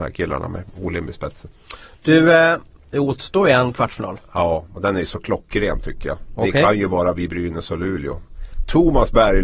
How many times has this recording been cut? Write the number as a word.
zero